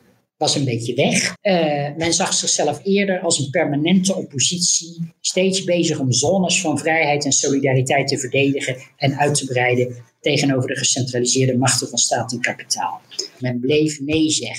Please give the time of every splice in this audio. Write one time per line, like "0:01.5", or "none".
0:01.3
0:05.2
0:13.4